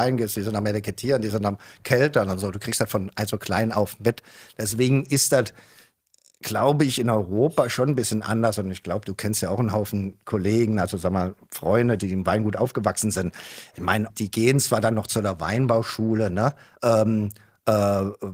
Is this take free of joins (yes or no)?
no